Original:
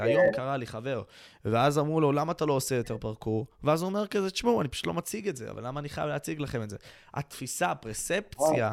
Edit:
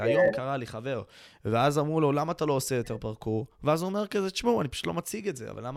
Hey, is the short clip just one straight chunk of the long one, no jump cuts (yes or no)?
yes